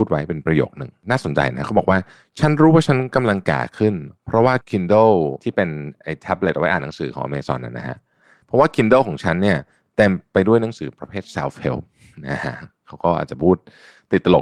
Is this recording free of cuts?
no; 1 cut; at 4.6 s

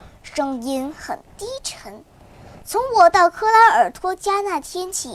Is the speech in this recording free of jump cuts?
yes; 0 cuts

